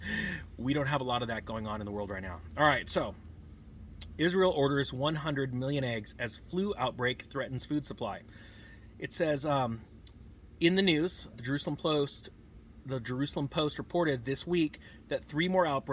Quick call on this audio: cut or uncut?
cut